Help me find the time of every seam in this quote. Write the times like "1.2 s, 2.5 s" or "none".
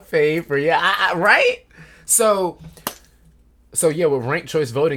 none